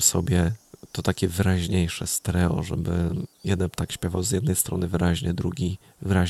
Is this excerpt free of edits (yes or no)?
no